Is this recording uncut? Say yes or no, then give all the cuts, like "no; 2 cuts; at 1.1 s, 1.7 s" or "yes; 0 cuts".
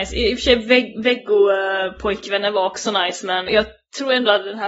no; 1 cut; at 3.5 s